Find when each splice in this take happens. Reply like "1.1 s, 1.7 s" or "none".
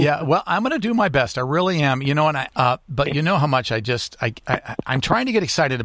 2.5 s